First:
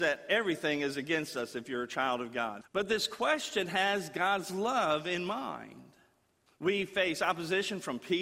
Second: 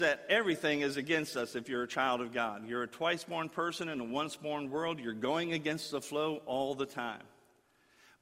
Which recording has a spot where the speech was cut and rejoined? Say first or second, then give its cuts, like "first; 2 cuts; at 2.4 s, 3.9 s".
first; 2 cuts; at 2.6 s, 6.5 s